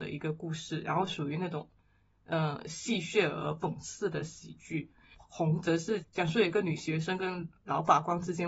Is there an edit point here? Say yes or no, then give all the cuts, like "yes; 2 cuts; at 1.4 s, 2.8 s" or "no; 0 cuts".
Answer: no; 0 cuts